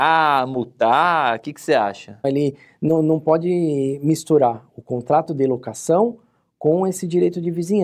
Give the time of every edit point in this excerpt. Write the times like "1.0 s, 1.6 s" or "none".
2.2 s